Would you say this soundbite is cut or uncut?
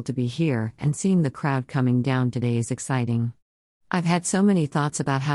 uncut